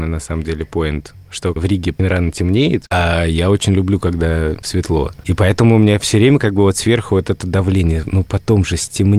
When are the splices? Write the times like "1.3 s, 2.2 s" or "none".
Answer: 2.0 s